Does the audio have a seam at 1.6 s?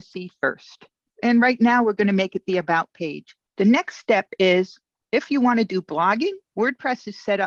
no; 1 cut; at 3.4 s

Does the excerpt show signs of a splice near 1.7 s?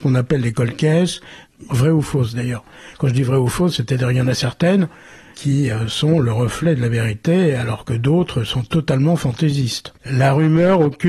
yes; 2 cuts; at 1.7 s, 10.0 s

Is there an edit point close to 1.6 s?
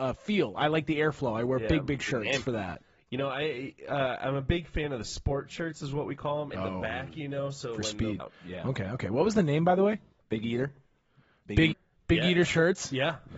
no; 3 cuts; at 6.5 s, 8.2 s, 11.7 s

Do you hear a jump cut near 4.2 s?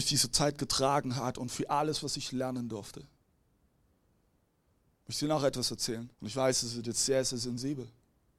no; 1 cut; at 6.1 s

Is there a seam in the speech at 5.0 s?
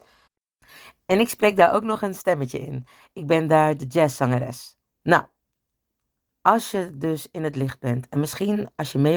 yes; 1 cut; at 5.0 s

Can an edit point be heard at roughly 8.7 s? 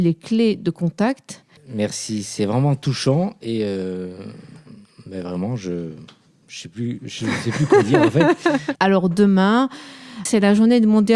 yes; 3 cuts; at 1.6 s, 8.7 s, 10.3 s

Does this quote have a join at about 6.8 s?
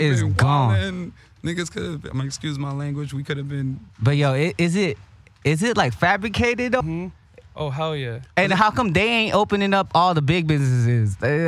yes; 1 cut; at 6.8 s

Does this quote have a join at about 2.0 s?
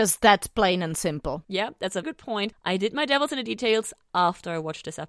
yes; 1 cut; at 2.0 s

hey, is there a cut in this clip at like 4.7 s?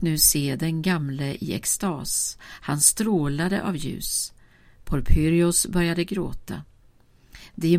no; 0 cuts

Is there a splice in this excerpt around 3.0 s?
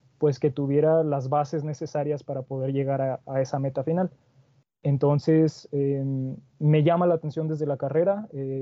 no; 0 cuts

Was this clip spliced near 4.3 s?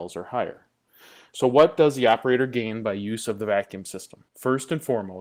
yes; 1 cut; at 4.3 s

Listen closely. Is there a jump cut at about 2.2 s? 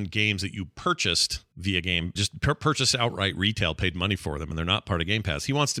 yes; 1 cut; at 2.2 s

